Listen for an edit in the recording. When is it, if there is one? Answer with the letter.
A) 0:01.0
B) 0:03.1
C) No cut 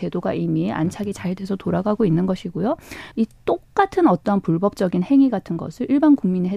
B